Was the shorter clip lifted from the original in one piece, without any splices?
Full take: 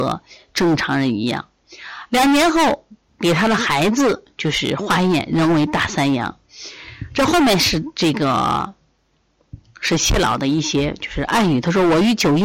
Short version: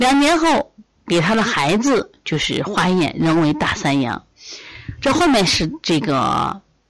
yes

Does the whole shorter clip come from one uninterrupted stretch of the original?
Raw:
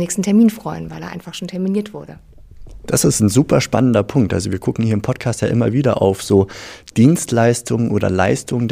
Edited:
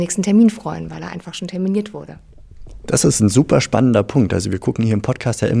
yes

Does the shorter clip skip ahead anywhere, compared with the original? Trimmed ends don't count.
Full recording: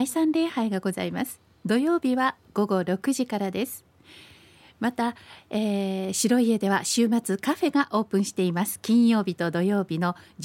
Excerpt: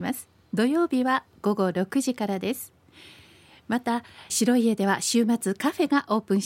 yes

